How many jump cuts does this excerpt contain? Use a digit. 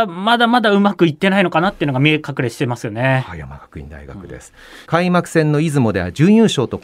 1